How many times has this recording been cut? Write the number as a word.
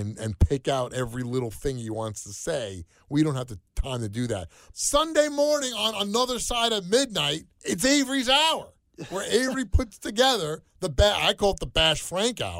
two